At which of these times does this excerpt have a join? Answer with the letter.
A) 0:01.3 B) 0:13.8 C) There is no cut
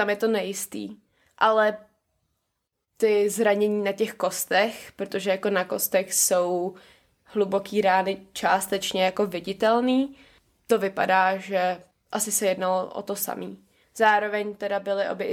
B